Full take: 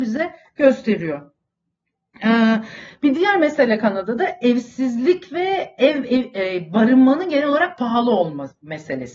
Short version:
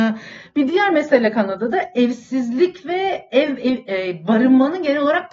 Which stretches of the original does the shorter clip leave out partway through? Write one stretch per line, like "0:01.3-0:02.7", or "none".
none

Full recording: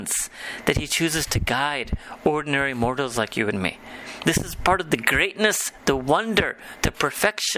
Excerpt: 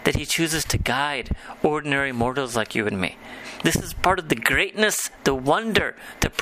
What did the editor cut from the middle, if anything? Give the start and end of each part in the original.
none

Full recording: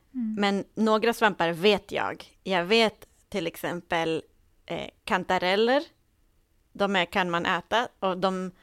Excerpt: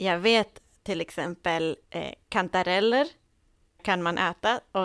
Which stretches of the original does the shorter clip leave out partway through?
0:04.3-0:04.6
0:06.5-0:07.1

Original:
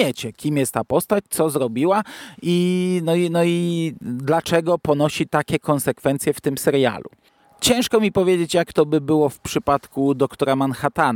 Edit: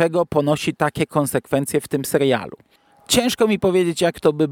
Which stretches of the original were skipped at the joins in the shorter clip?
none

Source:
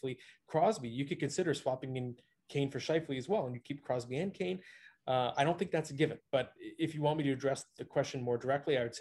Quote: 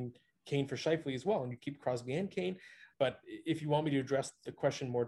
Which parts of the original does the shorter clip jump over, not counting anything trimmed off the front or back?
0:05.0-0:06.3

